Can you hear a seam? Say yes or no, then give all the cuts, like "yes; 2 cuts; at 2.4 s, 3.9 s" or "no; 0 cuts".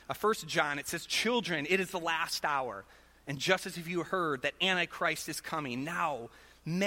no; 0 cuts